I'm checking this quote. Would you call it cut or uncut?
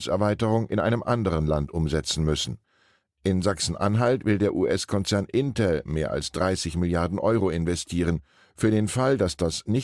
uncut